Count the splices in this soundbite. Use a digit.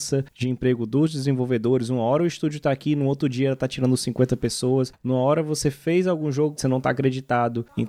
1